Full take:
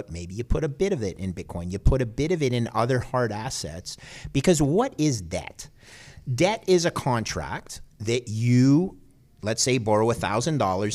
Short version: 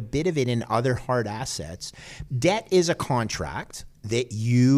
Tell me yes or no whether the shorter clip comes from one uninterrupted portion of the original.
no